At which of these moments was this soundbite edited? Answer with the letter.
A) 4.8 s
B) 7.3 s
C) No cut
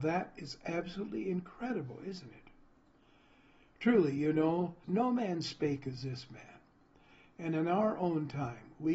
A